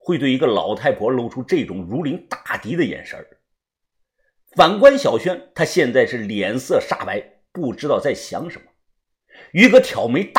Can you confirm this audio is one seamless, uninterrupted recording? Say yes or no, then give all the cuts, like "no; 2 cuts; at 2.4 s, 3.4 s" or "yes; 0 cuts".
yes; 0 cuts